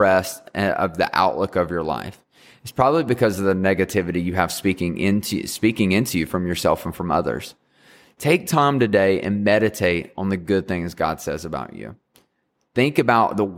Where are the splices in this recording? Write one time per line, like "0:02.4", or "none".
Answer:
none